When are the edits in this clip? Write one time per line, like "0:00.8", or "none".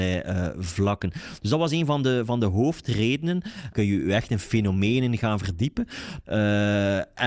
0:03.7
0:06.2